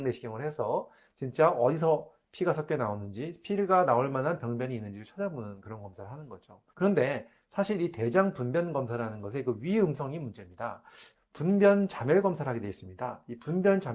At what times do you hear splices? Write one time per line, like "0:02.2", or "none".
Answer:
0:06.7
0:11.1

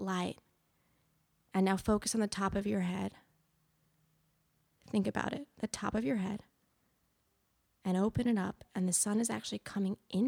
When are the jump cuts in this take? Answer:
none

